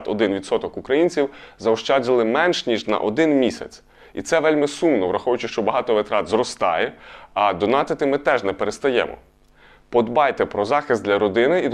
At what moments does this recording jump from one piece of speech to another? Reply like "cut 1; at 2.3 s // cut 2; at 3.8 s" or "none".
none